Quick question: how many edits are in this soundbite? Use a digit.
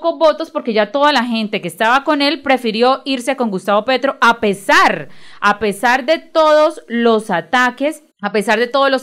1